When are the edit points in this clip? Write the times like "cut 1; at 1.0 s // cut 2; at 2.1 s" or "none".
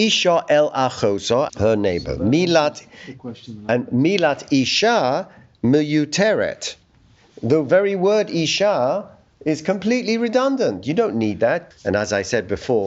cut 1; at 1.5 s // cut 2; at 11.7 s